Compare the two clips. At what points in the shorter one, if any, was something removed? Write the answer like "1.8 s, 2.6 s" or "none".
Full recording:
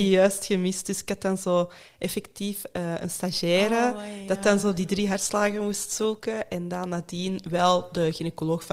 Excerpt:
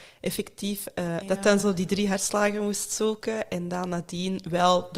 1.2 s